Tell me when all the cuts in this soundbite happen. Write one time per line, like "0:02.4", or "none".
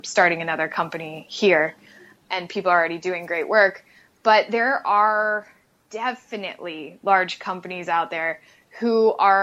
none